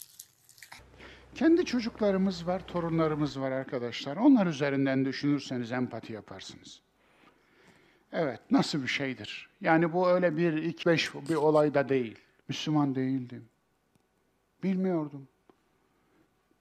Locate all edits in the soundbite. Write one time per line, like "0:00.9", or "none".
0:10.8
0:12.4

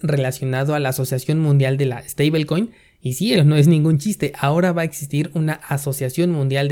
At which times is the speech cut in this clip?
0:03.4

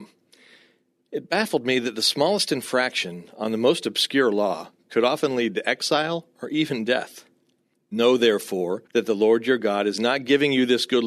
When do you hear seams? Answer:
0:07.7
0:08.9

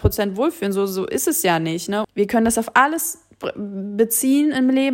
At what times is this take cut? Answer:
0:02.0

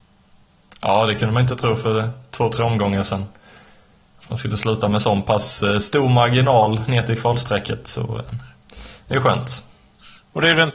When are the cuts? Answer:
none

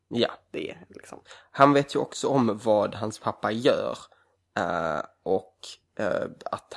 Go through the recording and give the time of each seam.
none

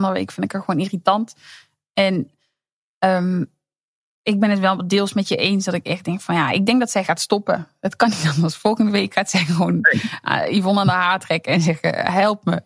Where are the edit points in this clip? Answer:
none

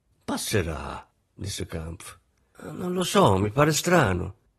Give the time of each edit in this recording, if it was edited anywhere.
0:02.5

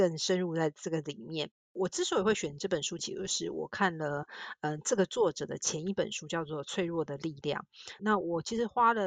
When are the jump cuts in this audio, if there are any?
0:03.0
0:08.0

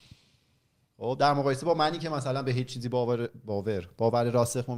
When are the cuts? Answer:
none

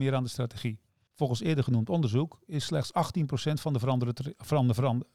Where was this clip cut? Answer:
0:01.1

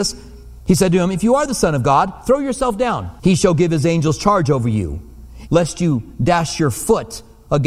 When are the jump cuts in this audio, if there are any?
0:03.2
0:05.5

